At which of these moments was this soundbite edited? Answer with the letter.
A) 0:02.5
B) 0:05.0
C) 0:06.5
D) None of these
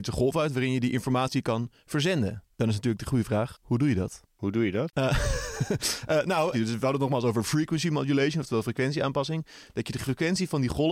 C